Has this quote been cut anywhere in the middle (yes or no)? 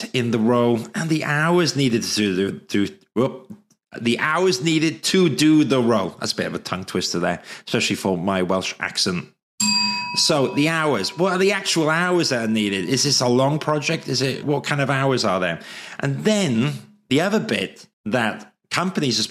yes